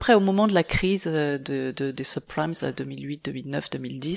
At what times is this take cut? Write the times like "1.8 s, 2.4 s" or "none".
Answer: none